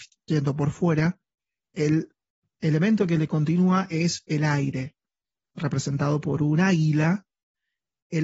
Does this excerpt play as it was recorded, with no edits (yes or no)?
yes